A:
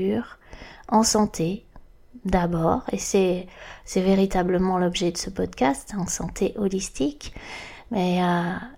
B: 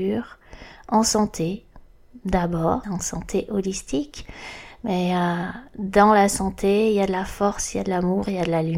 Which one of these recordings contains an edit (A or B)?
B